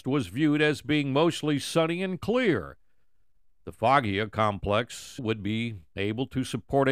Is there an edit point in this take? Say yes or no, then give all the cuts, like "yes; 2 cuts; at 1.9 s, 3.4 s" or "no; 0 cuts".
yes; 1 cut; at 5.2 s